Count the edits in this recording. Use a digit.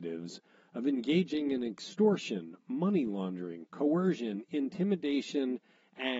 0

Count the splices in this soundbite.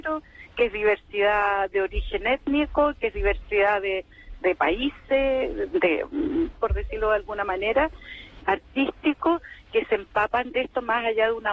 3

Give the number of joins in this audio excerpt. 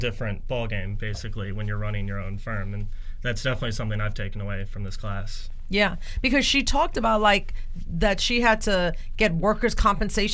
0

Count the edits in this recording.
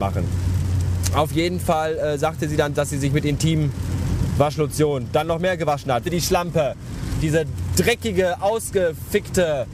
2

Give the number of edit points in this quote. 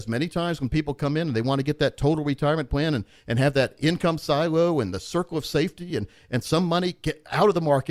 0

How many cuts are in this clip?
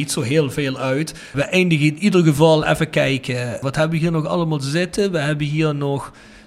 0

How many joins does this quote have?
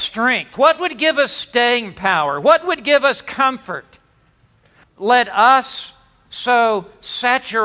1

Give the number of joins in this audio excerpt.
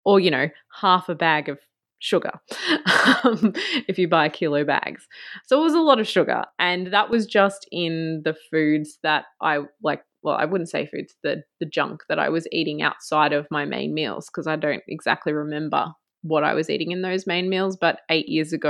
0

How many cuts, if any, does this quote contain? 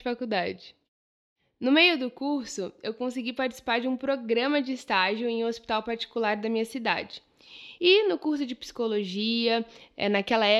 1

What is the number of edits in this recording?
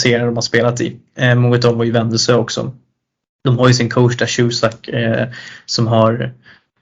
0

